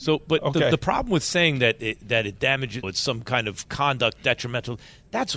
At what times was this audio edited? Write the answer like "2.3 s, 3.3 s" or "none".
2.8 s